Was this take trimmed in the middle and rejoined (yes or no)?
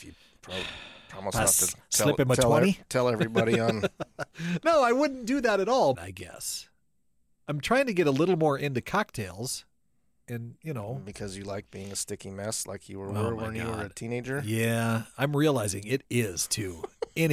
yes